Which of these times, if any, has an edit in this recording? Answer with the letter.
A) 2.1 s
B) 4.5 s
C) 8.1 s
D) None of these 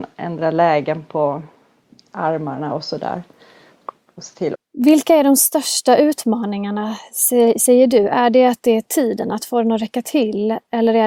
B